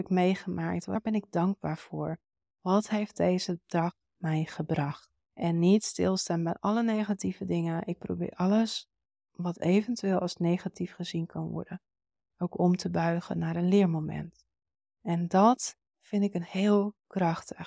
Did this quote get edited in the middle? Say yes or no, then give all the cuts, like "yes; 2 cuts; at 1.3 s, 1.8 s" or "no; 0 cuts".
yes; 1 cut; at 5.2 s